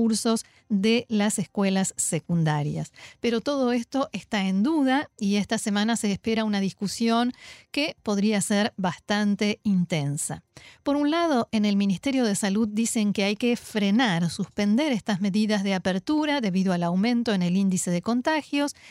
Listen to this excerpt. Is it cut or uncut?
uncut